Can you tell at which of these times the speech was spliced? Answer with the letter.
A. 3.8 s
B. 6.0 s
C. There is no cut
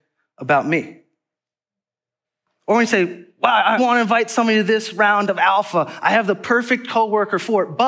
A